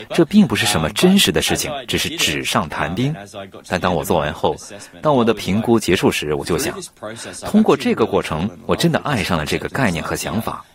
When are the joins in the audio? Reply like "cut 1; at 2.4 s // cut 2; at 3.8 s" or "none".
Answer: none